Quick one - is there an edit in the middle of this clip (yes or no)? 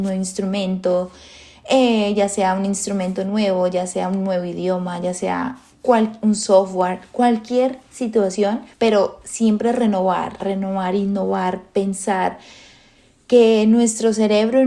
yes